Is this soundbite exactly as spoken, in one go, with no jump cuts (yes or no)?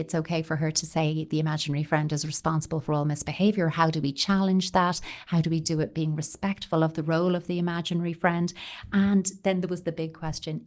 yes